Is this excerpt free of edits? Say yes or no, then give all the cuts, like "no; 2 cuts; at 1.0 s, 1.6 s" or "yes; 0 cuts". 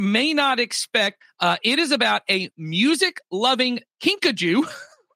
no; 1 cut; at 1.2 s